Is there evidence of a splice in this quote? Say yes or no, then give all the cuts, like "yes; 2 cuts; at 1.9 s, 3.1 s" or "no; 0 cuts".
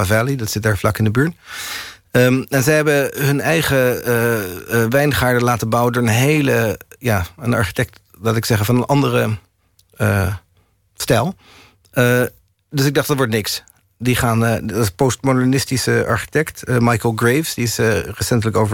no; 0 cuts